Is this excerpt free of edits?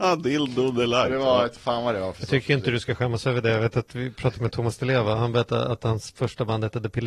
yes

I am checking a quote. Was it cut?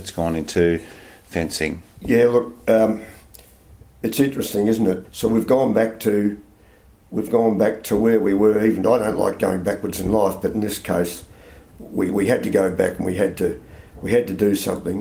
yes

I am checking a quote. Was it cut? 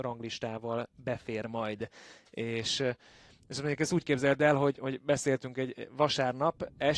no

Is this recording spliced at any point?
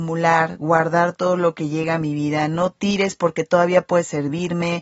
no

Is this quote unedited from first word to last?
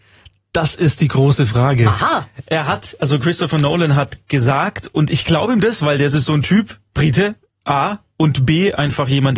yes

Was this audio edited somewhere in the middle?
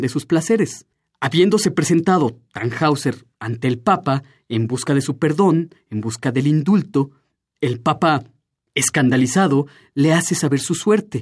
no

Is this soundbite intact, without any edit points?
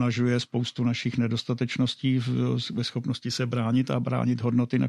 yes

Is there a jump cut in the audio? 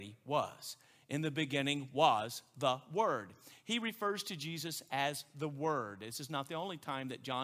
no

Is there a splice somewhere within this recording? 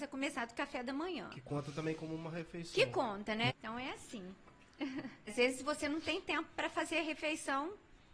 yes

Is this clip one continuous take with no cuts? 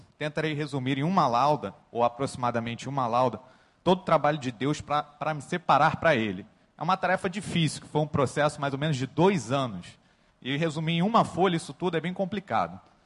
yes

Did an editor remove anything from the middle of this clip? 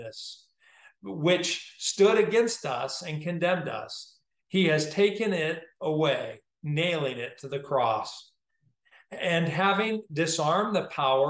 no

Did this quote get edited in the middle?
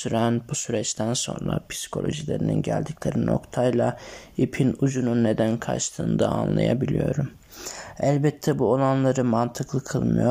no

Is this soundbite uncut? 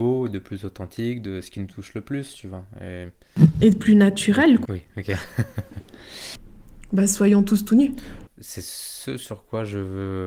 no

